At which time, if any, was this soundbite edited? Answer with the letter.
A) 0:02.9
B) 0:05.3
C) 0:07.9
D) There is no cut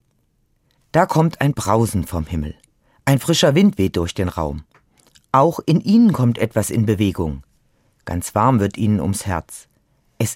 D